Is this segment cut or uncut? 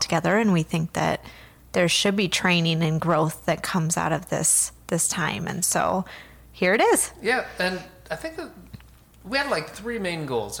uncut